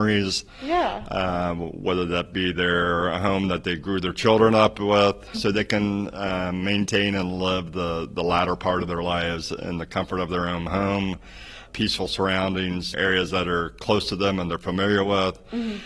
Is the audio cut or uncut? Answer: cut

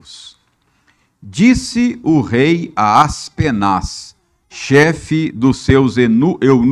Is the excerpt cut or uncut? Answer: uncut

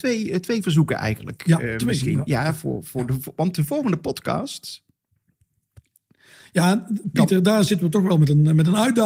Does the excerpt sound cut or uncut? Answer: uncut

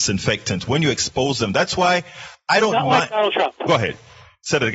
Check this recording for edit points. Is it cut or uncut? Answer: uncut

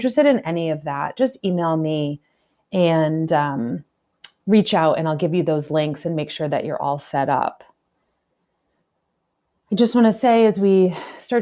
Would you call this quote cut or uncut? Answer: uncut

